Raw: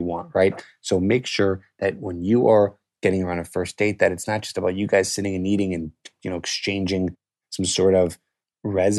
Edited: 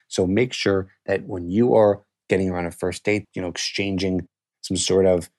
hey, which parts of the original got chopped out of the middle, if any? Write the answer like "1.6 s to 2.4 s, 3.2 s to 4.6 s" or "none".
4.0 s to 6.1 s